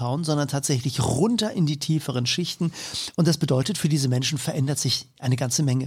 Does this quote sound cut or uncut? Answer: cut